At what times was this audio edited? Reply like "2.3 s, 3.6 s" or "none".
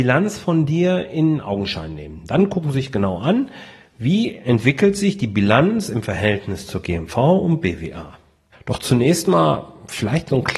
8.5 s